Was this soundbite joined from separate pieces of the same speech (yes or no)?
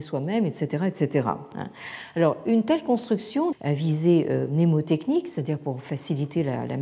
yes